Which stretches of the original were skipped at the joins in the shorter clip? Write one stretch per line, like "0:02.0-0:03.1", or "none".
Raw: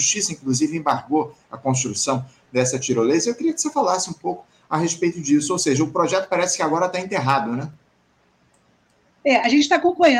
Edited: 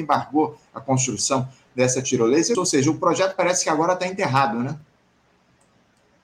0:03.3-0:05.5